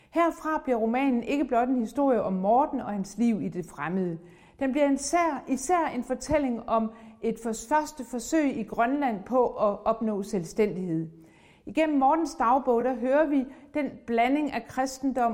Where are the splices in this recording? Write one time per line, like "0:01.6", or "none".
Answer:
none

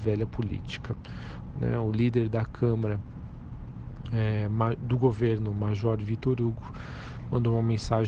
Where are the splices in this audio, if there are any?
0:01.5

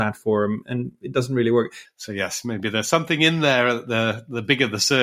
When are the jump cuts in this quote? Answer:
0:01.8

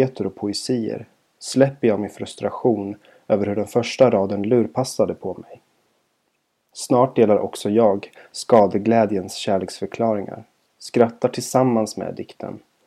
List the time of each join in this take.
none

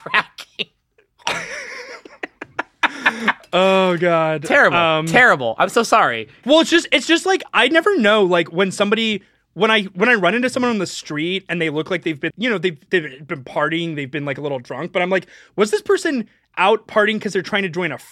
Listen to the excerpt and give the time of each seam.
0:12.3

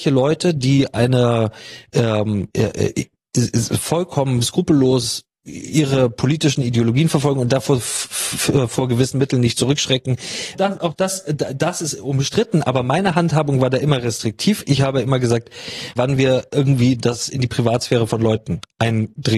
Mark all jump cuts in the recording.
0:10.5
0:16.0

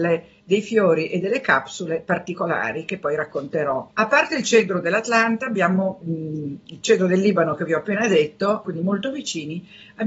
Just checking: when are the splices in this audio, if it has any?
0:03.9
0:06.0
0:08.6

